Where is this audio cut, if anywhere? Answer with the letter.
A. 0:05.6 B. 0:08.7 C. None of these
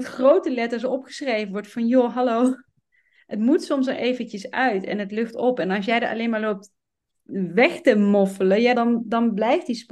B